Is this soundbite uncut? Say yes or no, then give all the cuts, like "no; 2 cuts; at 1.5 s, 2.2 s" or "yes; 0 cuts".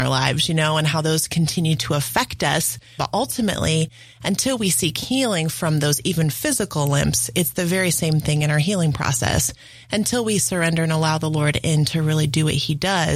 no; 1 cut; at 3.0 s